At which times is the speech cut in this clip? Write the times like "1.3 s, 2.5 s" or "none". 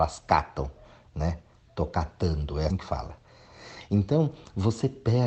2.7 s